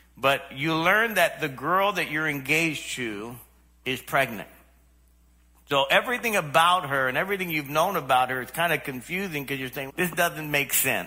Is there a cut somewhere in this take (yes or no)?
yes